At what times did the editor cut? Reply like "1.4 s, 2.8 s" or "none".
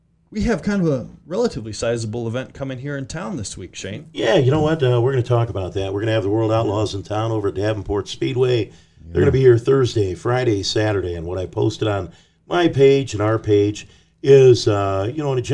none